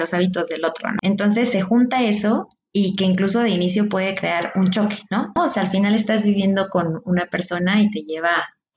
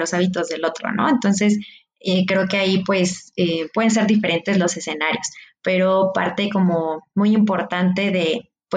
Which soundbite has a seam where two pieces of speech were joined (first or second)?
first